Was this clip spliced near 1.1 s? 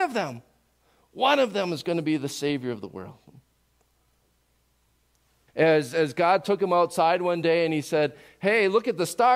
no; 1 cut; at 5.5 s

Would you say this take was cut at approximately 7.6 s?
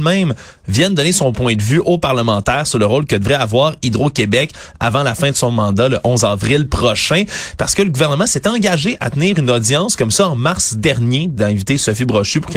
no; 0 cuts

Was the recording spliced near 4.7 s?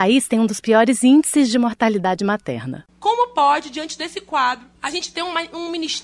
yes; 1 cut; at 4.7 s

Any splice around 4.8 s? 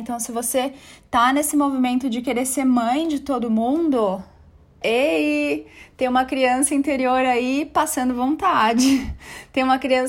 yes; 1 cut; at 4.8 s

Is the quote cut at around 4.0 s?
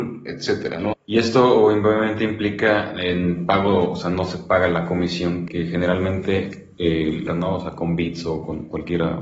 no; 3 cuts; at 0.9 s, 5.5 s, 7.3 s

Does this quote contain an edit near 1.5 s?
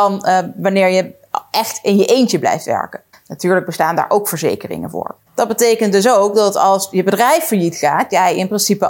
no; 2 cuts; at 3.1 s, 5.3 s

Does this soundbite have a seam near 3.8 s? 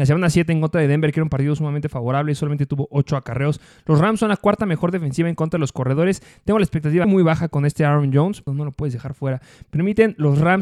no; 2 cuts; at 7.0 s, 8.5 s

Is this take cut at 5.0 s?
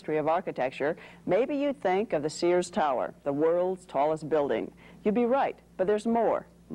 no; 0 cuts

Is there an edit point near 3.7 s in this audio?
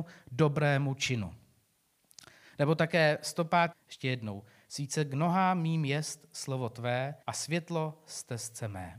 yes; 2 cuts; at 3.7 s, 7.2 s

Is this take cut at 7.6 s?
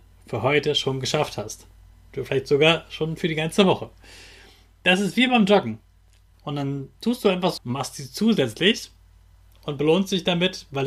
yes; 2 cuts; at 6.3 s, 7.6 s

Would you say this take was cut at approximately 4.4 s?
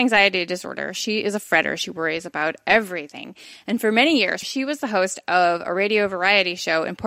yes; 1 cut; at 4.4 s

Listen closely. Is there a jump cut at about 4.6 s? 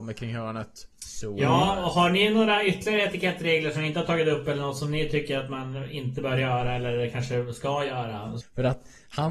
no; 2 cuts; at 0.9 s, 8.4 s

